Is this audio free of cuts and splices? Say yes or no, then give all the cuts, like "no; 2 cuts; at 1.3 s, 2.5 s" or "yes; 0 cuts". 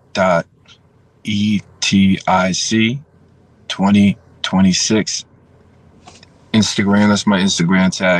yes; 0 cuts